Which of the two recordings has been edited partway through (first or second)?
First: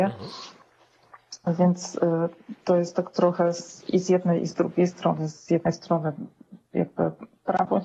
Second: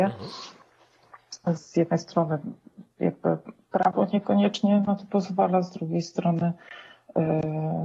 second